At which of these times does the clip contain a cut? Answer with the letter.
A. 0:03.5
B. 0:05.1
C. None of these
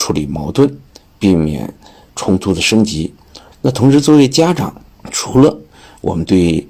A